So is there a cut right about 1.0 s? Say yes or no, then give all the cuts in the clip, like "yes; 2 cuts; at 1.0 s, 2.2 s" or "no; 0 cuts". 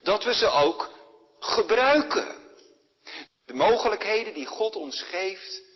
no; 1 cut; at 3.3 s